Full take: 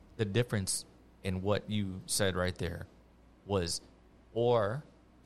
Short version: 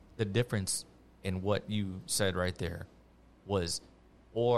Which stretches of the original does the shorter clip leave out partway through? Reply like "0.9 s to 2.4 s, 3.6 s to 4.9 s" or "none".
none